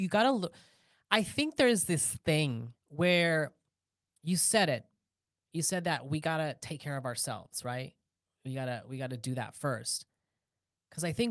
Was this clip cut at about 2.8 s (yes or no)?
yes